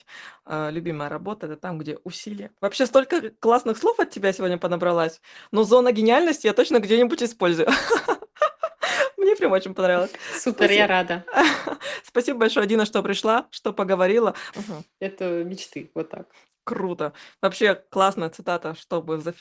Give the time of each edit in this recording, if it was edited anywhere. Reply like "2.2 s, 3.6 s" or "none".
14.5 s